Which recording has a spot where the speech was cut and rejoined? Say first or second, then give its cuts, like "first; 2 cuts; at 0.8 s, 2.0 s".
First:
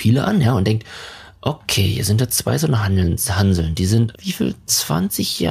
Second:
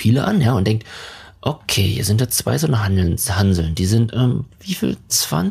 first; 1 cut; at 4.1 s